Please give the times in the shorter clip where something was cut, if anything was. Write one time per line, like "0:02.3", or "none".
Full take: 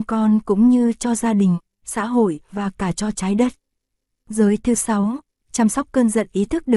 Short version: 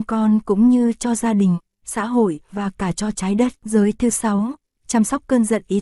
0:03.6